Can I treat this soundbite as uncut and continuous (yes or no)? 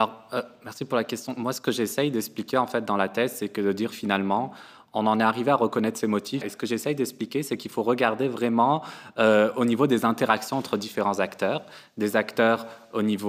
no